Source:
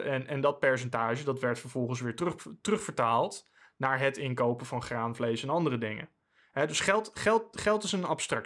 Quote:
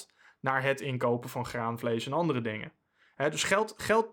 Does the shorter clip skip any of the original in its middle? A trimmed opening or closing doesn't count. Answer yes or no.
no